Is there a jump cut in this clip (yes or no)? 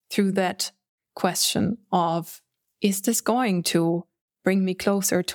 no